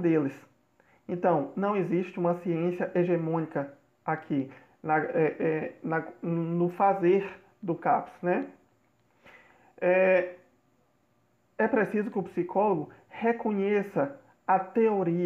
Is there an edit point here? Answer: no; 0 cuts

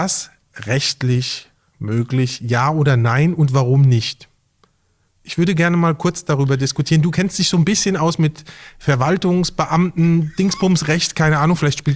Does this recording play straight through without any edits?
yes; 0 cuts

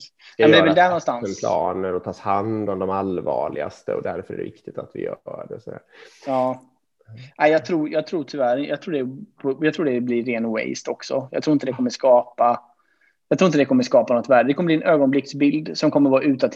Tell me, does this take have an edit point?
no; 0 cuts

